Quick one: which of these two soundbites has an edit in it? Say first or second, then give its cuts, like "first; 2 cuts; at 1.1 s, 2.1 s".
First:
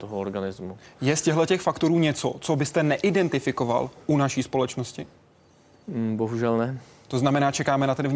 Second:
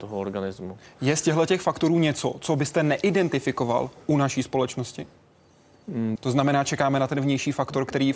second; 1 cut; at 6.2 s